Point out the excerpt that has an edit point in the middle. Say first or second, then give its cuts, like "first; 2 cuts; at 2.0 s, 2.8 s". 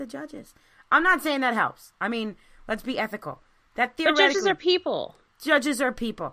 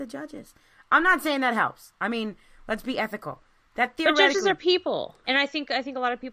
second; 1 cut; at 5.2 s